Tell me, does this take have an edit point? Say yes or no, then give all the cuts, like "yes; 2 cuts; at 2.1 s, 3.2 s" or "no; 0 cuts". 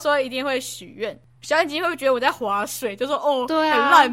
yes; 1 cut; at 1.4 s